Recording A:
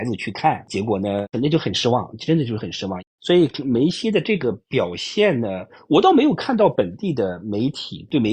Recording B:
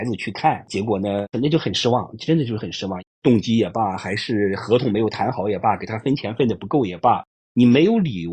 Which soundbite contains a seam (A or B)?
B